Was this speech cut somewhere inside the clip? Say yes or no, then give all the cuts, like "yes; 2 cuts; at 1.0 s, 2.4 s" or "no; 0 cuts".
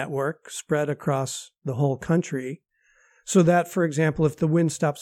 no; 0 cuts